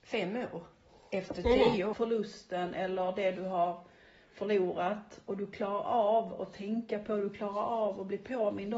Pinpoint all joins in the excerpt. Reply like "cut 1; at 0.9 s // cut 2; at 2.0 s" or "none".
cut 1; at 1.9 s